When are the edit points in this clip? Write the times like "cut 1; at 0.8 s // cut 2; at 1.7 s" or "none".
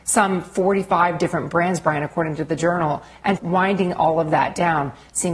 cut 1; at 3.4 s